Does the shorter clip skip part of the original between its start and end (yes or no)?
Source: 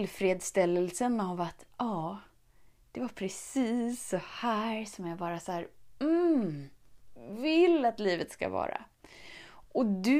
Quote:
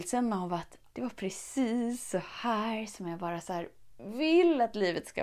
yes